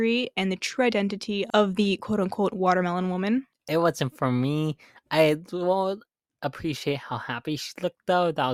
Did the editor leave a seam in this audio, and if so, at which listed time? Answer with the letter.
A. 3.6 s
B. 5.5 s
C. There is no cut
A